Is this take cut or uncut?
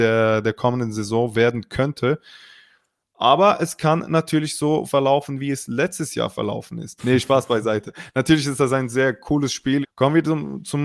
cut